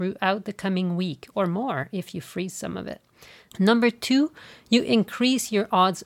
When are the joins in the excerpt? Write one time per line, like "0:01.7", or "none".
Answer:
0:03.5